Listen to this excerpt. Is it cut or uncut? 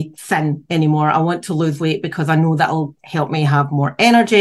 uncut